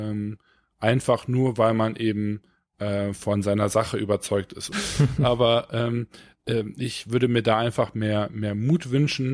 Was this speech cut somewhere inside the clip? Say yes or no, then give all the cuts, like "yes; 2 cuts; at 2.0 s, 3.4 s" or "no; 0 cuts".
yes; 1 cut; at 4.7 s